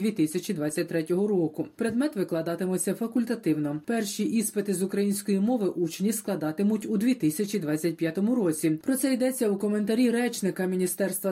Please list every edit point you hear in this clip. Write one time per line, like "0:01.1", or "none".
0:08.8